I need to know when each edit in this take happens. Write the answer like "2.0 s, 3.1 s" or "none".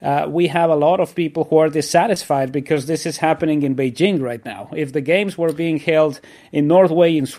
none